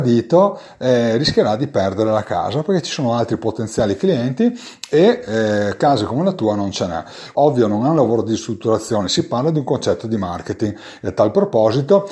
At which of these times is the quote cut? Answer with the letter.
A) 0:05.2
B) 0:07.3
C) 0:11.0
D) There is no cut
B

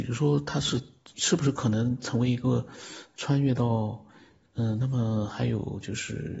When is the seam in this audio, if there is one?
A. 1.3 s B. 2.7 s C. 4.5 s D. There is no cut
C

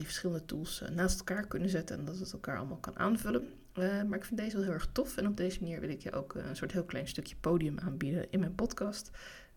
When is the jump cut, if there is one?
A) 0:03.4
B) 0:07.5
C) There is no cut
C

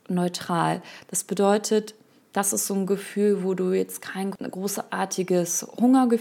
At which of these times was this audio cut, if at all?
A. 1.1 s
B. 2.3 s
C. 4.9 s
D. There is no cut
D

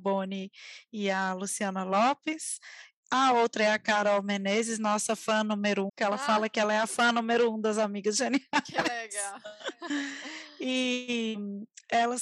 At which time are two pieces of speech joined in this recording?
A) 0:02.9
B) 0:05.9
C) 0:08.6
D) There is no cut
B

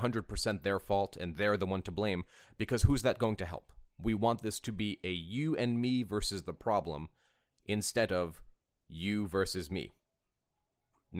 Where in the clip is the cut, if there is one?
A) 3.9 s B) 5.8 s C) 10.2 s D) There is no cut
A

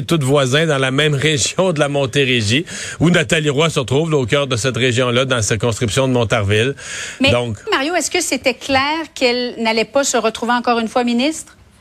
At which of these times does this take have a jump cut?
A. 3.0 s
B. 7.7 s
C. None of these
B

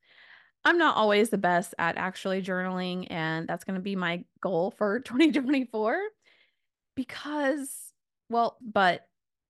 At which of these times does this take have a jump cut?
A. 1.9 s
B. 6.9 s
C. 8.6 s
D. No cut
C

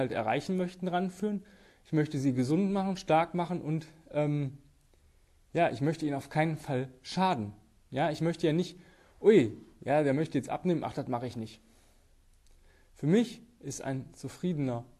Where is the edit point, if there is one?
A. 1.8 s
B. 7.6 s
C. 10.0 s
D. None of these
D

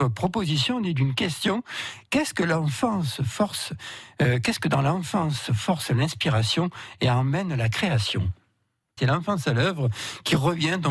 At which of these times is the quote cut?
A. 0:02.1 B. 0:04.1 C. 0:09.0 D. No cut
C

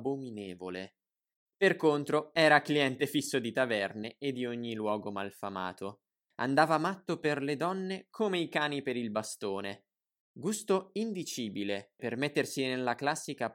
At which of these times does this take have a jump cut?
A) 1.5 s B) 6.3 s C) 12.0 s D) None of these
C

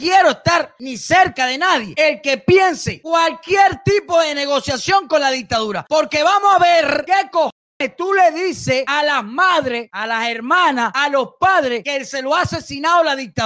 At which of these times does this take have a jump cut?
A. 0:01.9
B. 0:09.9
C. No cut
C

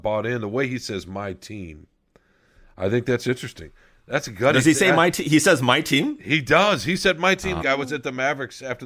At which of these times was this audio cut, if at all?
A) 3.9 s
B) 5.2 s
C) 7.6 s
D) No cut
C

